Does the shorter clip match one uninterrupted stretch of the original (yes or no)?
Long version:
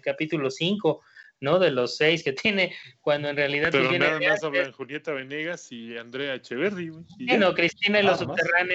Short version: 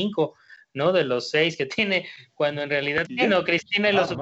no